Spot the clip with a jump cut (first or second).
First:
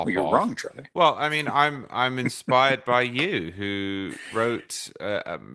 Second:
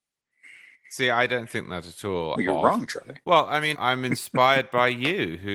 second